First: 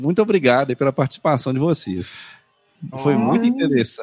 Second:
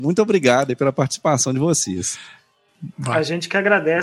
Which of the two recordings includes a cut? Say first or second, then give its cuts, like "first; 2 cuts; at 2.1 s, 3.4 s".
first; 1 cut; at 2.9 s